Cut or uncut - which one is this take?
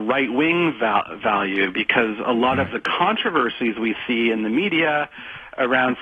uncut